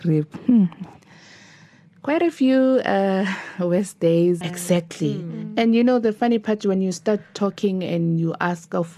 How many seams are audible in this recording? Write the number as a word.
one